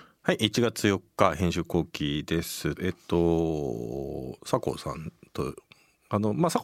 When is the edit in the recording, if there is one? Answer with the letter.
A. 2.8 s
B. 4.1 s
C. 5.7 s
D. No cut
A